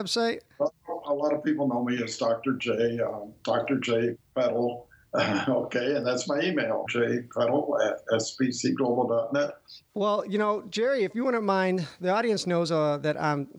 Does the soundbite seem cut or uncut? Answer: cut